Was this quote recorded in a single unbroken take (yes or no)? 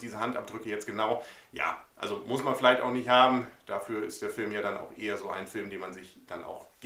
yes